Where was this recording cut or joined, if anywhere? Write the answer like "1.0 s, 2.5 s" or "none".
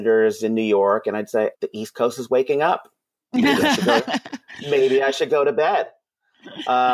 1.5 s